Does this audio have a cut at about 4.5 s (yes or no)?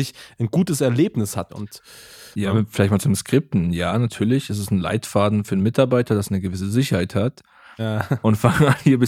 no